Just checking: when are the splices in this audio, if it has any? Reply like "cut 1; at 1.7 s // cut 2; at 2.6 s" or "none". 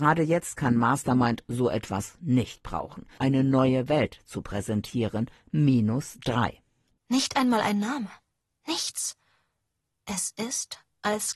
cut 1; at 3.2 s // cut 2; at 6.9 s